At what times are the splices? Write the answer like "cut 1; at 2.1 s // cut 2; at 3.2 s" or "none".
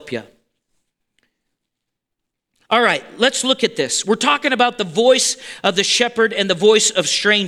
none

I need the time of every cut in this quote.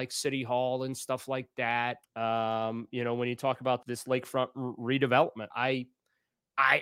cut 1; at 2.0 s // cut 2; at 3.8 s // cut 3; at 5.5 s

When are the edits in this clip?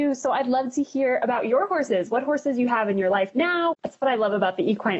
cut 1; at 3.7 s

